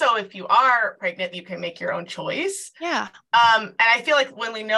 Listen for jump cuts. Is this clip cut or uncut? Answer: cut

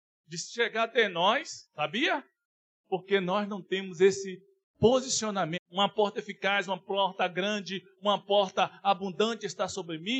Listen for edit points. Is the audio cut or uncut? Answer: cut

